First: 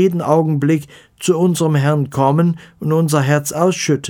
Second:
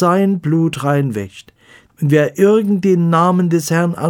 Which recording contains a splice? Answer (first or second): second